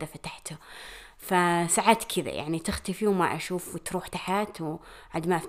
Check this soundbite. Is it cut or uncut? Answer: cut